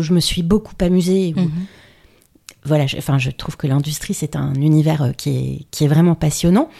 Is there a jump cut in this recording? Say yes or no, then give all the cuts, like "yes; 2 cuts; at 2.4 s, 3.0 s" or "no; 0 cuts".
yes; 1 cut; at 1.3 s